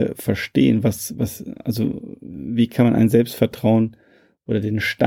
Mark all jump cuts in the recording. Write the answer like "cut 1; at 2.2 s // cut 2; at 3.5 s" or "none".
none